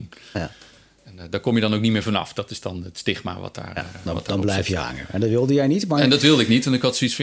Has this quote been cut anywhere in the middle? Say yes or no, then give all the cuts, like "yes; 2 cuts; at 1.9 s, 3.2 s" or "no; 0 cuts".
no; 0 cuts